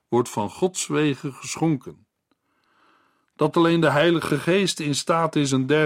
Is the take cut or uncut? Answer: uncut